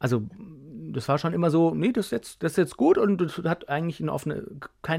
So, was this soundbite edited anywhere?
no; 0 cuts

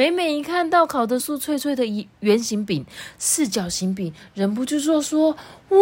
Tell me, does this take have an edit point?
yes; 1 cut; at 1.2 s

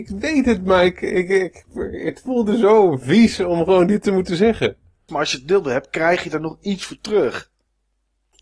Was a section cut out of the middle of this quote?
yes; 1 cut; at 5.1 s

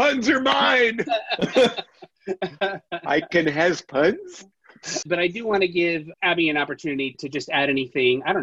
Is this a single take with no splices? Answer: no; 2 cuts; at 5.0 s, 7.1 s

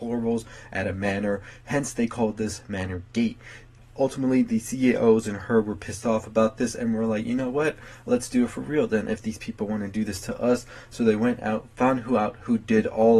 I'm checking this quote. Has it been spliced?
no; 0 cuts

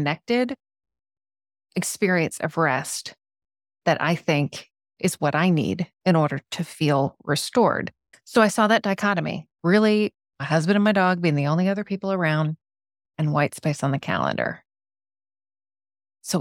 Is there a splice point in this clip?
yes; 3 cuts; at 8.1 s, 9.5 s, 13.1 s

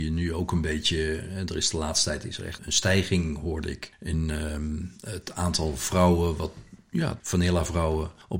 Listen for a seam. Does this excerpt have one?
yes; 2 cuts; at 2.6 s, 7.2 s

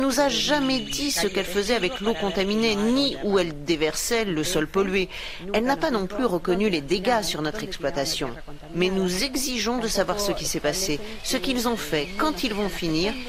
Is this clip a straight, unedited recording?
yes; 0 cuts

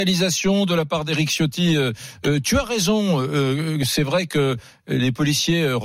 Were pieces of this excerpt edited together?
no; 0 cuts

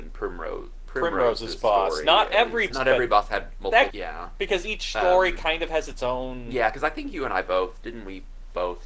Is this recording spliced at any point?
yes; 2 cuts; at 2.7 s, 3.9 s

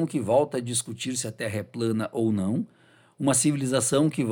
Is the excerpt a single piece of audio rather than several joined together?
yes; 0 cuts

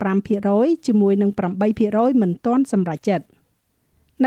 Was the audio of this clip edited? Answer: yes; 1 cut; at 3.0 s

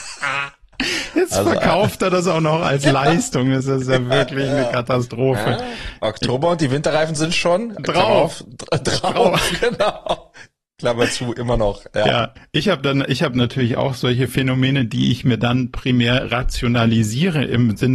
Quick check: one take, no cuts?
yes; 0 cuts

